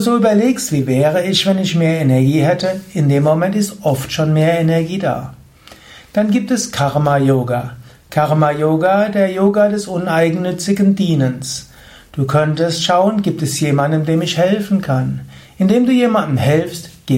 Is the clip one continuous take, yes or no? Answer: yes